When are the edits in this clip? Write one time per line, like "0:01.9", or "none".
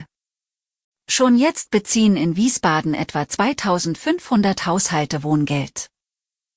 none